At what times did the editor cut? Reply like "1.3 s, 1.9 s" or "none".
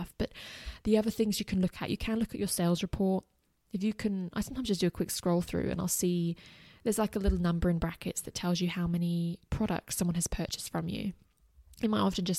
none